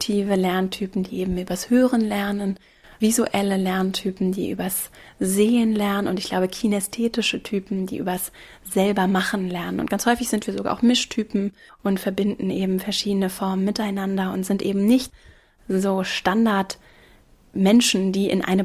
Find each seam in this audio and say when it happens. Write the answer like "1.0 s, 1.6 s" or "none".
none